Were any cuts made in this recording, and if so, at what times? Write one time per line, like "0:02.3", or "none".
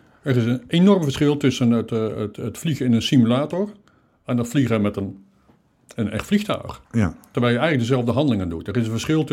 none